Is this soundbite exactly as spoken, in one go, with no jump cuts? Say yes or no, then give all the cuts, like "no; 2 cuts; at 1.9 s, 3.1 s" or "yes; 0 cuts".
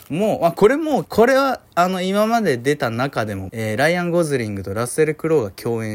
no; 2 cuts; at 1.0 s, 3.5 s